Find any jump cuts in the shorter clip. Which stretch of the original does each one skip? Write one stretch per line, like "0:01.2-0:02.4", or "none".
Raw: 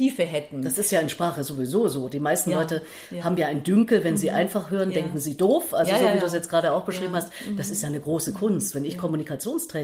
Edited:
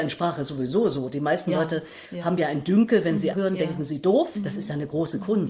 0:04.3-0:04.7
0:05.7-0:07.5